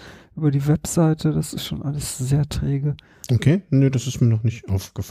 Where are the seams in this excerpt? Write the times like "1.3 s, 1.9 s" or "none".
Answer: none